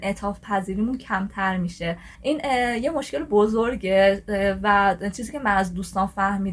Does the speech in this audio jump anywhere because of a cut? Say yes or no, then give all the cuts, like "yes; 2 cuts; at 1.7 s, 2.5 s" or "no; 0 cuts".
yes; 1 cut; at 2.1 s